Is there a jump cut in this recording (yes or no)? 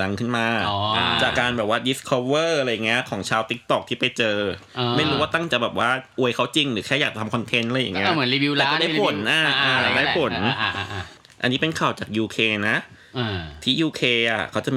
yes